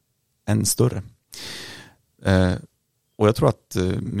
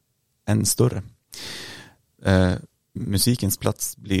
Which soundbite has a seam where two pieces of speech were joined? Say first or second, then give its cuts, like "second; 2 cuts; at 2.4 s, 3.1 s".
second; 1 cut; at 3.0 s